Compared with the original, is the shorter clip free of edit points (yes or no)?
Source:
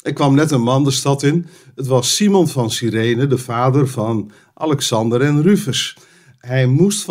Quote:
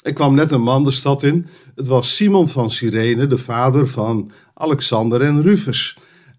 yes